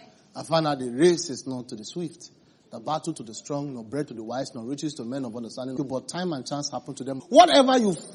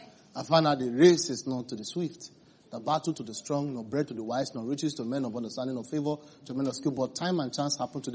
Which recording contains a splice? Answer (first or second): first